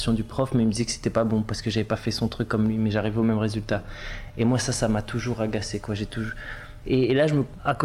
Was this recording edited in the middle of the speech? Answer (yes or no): yes